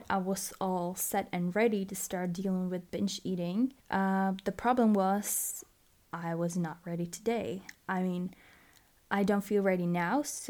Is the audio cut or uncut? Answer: cut